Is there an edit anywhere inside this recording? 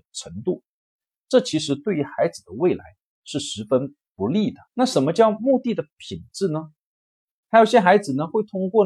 yes; 2 cuts; at 4.7 s, 7.4 s

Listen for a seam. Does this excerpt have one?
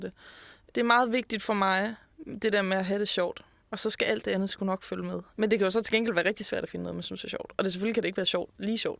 yes; 1 cut; at 5.3 s

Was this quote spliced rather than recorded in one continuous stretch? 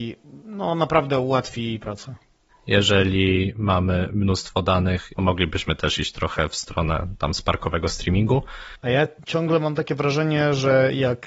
yes; 3 cuts; at 2.5 s, 5.1 s, 8.8 s

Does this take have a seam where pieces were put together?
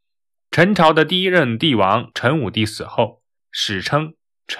yes; 1 cut; at 3.4 s

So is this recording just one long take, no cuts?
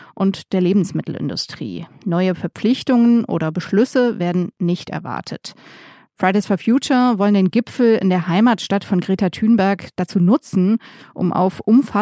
yes; 0 cuts

